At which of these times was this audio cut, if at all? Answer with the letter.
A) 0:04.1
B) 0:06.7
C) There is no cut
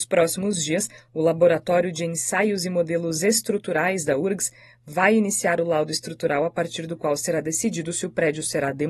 C